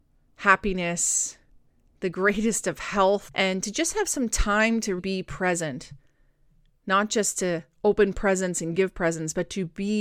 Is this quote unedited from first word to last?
no; 2 cuts; at 3.3 s, 5.0 s

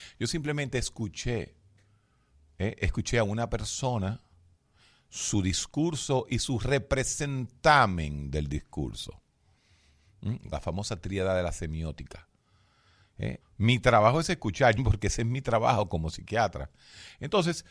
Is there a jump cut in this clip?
yes; 3 cuts; at 10.5 s, 13.4 s, 14.8 s

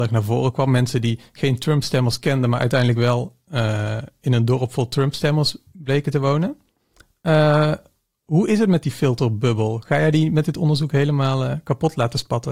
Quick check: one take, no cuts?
yes; 0 cuts

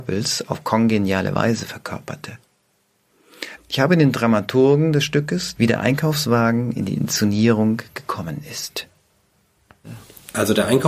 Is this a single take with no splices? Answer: no; 2 cuts; at 3.6 s, 5.5 s

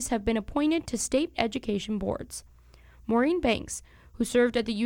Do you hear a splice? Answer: no; 0 cuts

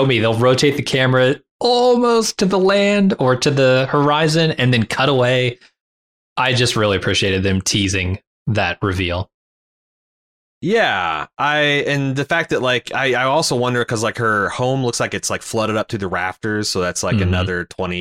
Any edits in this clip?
no; 0 cuts

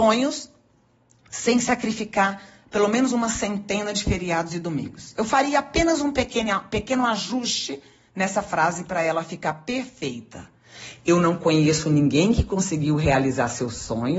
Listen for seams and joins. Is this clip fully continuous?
yes; 0 cuts

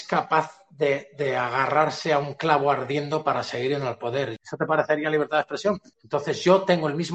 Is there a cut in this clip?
yes; 2 cuts; at 4.4 s, 5.9 s

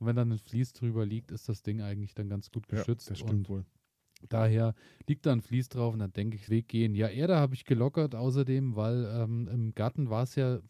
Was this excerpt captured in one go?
no; 1 cut; at 6.5 s

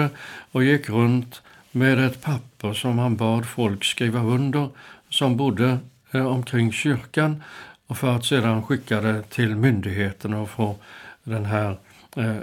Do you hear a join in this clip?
no; 0 cuts

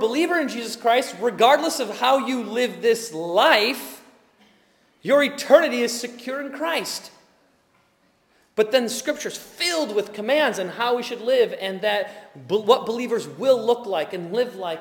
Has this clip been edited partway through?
no; 0 cuts

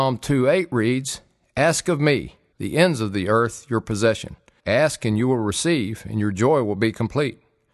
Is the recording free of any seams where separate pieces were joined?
no; 2 cuts; at 2.5 s, 4.6 s

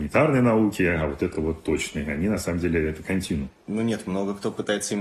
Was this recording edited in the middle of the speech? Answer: no; 0 cuts

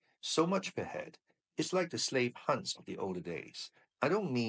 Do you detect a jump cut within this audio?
no; 0 cuts

